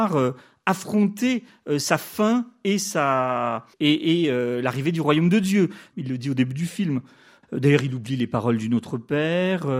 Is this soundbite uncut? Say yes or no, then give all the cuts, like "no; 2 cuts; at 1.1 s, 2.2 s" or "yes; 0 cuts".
no; 3 cuts; at 3.7 s, 5.9 s, 7.4 s